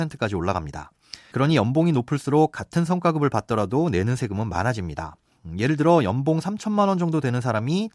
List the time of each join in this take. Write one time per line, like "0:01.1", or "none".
0:01.3